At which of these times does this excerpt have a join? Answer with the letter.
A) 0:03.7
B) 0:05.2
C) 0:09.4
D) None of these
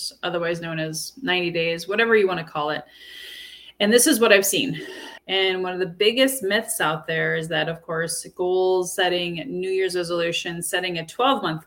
B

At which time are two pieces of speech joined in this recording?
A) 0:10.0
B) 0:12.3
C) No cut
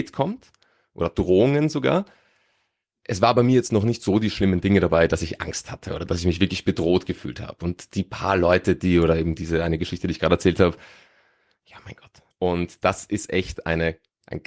B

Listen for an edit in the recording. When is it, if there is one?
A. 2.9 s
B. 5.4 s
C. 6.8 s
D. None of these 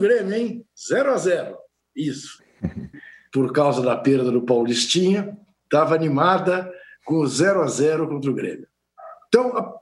A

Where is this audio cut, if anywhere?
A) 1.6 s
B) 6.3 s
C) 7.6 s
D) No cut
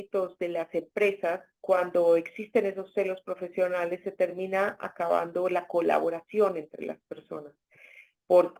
A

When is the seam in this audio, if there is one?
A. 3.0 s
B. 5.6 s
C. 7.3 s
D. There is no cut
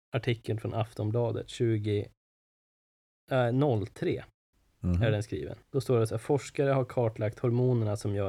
B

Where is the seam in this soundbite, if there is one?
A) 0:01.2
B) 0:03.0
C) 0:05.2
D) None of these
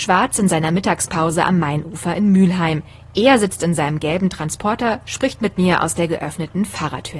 D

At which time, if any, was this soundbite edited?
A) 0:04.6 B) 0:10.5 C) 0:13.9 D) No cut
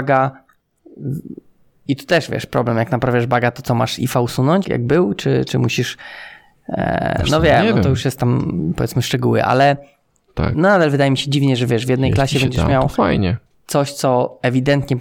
A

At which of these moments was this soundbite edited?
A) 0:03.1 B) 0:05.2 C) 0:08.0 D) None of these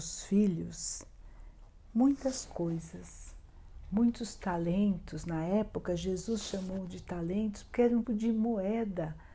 C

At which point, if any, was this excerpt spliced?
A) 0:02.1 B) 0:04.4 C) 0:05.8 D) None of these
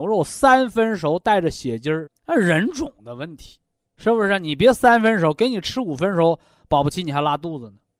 A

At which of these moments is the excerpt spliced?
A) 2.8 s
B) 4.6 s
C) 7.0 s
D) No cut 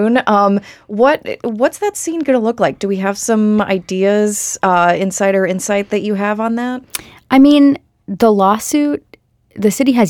D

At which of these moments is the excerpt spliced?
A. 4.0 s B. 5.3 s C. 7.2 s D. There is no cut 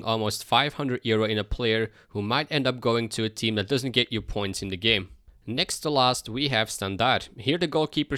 D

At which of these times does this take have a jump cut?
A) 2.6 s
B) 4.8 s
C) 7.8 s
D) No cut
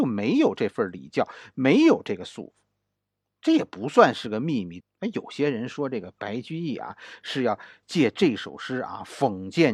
B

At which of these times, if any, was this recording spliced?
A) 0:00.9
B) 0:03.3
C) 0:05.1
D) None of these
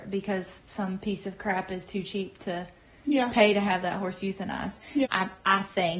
C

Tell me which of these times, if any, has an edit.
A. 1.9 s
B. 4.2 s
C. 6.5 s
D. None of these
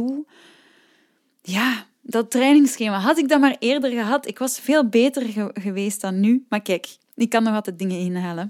D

